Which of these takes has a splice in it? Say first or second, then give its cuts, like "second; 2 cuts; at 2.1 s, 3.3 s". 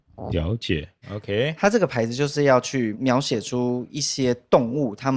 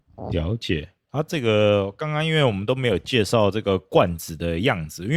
first; 2 cuts; at 1.0 s, 2.9 s